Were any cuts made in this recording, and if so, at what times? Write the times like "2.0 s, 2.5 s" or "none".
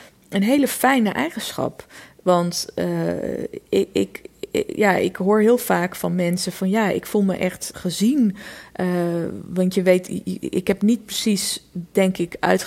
7.7 s